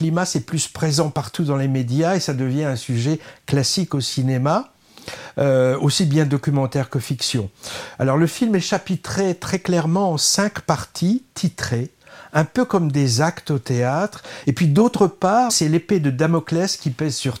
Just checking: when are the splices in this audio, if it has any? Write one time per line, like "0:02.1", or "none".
0:14.4
0:15.5